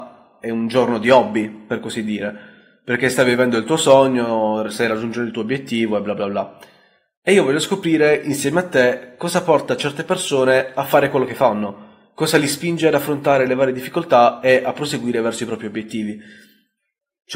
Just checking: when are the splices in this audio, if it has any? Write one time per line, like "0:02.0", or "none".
none